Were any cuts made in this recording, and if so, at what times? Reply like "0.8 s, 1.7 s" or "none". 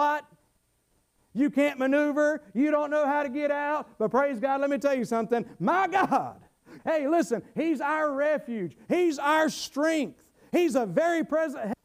6.8 s